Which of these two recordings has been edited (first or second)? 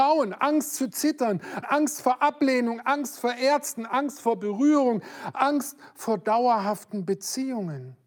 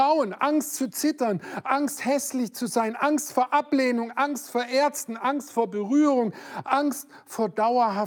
first